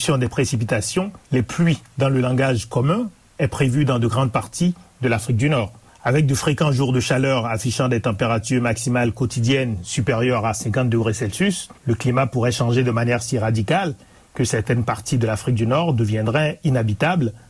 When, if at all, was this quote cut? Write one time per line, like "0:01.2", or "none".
0:01.2
0:11.8